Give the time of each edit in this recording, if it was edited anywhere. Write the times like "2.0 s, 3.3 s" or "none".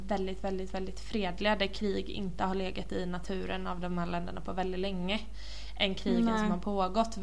none